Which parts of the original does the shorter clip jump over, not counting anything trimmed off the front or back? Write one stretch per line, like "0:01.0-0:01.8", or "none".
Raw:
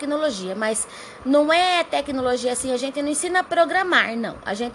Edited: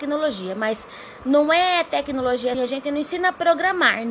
0:02.5-0:02.7